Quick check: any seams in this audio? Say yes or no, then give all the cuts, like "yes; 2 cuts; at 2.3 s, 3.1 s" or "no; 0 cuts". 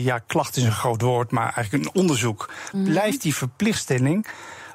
yes; 1 cut; at 2.7 s